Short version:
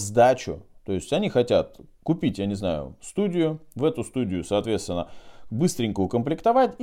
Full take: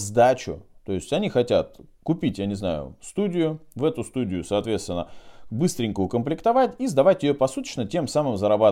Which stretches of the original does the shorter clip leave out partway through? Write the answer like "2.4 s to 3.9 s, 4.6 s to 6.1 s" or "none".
none